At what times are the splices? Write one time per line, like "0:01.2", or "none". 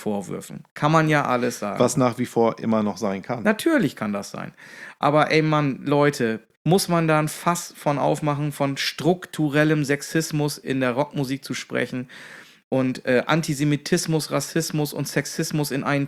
none